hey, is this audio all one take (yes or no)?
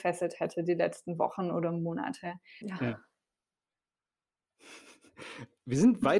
no